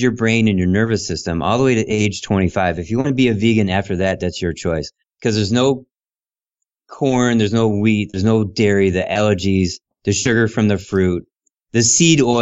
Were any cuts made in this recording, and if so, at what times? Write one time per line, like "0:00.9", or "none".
0:05.0